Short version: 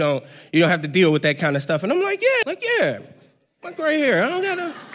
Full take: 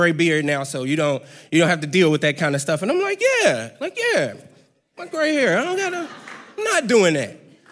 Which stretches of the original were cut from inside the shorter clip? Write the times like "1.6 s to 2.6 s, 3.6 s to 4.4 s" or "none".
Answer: 3.4 s to 3.8 s